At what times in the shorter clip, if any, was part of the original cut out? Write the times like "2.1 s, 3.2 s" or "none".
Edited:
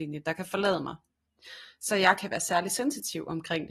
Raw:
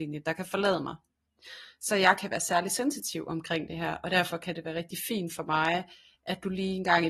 none